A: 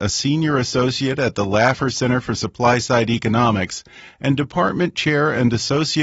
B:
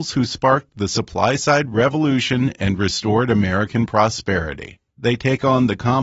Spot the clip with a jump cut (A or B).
B